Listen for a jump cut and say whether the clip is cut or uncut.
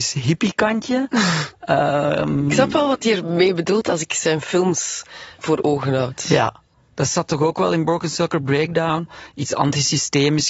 uncut